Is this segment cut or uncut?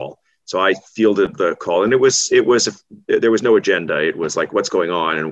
uncut